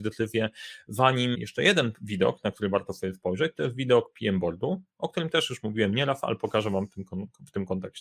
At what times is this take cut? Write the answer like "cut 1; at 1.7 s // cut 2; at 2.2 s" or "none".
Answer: cut 1; at 1.3 s

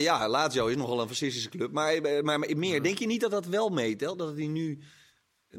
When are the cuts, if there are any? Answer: none

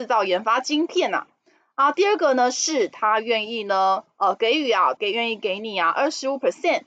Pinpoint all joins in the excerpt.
cut 1; at 5.0 s

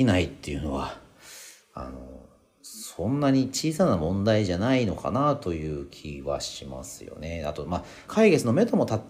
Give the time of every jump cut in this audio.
cut 1; at 8.1 s

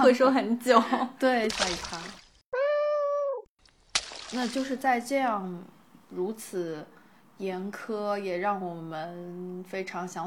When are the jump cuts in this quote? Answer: cut 1; at 1.5 s

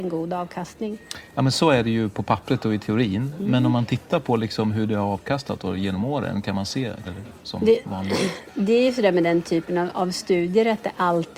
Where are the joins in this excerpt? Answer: cut 1; at 7.0 s

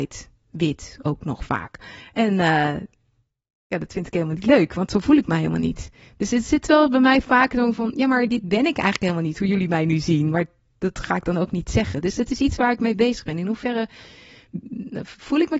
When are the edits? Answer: none

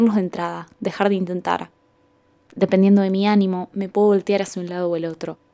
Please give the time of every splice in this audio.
none

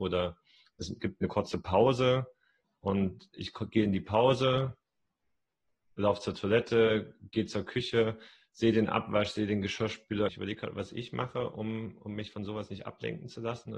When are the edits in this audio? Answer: cut 1; at 10.3 s

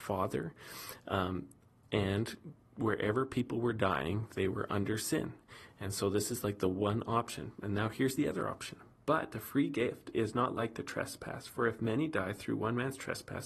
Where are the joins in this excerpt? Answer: none

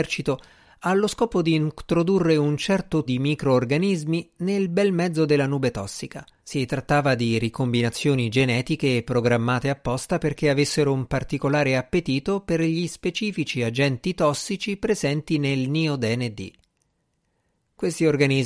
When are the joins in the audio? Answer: cut 1; at 3.1 s // cut 2; at 6.4 s

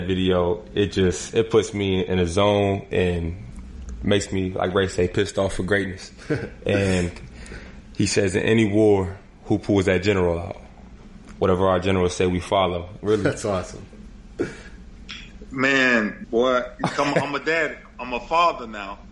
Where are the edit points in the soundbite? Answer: cut 1; at 11.3 s // cut 2; at 13.0 s // cut 3; at 16.2 s

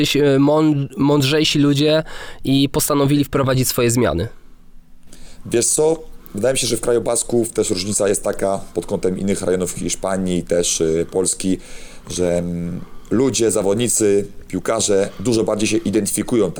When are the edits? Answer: none

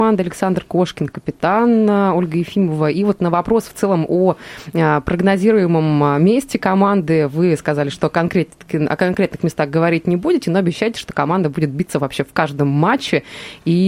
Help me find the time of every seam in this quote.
none

